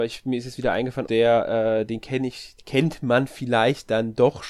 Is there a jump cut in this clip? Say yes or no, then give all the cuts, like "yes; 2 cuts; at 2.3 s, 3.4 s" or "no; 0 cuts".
yes; 1 cut; at 1.0 s